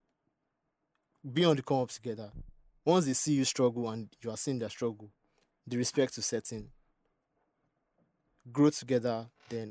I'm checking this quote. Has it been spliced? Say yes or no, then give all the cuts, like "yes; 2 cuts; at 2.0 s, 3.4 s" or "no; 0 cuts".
no; 0 cuts